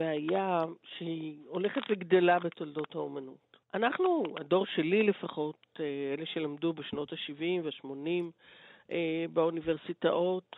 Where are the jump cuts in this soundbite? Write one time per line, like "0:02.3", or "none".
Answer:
0:03.6